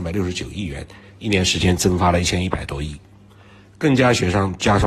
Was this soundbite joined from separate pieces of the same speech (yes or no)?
no